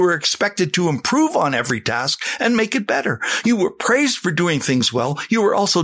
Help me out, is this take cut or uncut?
uncut